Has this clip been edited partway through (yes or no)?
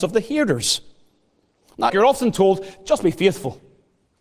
yes